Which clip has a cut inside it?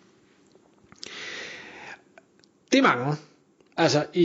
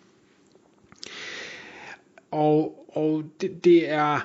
second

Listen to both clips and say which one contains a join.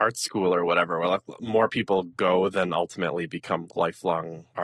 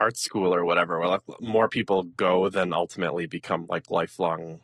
first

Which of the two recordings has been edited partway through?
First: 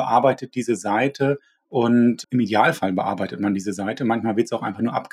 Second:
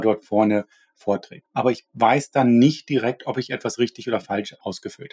second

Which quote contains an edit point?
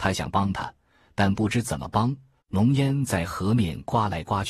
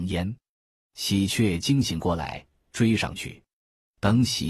first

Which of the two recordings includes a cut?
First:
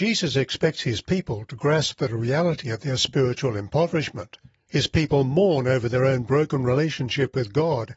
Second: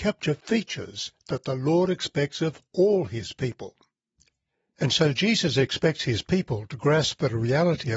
first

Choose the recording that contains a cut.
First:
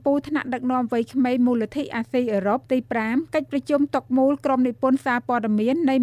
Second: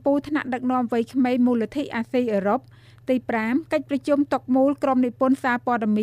first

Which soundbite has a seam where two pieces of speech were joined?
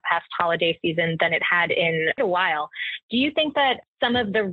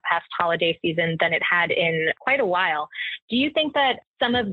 first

